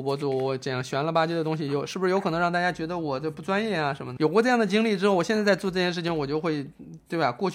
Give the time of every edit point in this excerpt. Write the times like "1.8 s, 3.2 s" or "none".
4.2 s